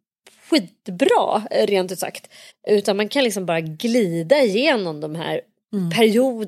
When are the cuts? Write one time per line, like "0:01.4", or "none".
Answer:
0:02.5